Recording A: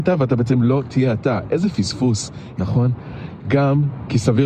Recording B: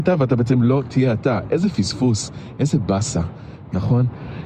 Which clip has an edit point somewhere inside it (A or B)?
A